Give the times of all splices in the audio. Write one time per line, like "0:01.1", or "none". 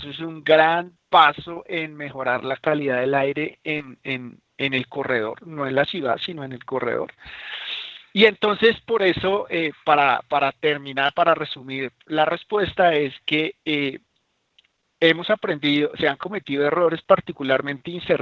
none

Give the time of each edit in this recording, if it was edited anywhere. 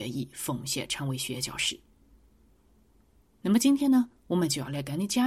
none

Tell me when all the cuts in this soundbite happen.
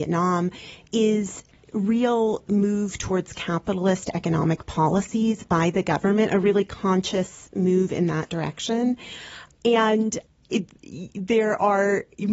0:09.6

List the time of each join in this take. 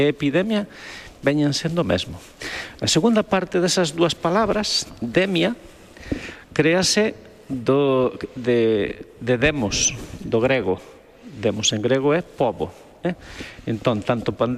none

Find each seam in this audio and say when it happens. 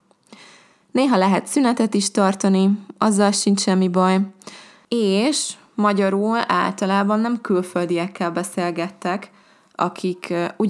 0:04.8

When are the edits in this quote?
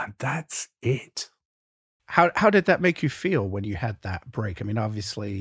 0:02.0

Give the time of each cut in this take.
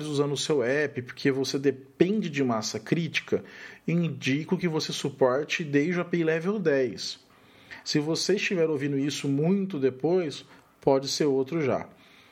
0:07.8

